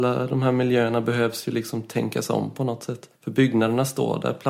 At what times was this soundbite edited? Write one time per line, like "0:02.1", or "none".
0:03.2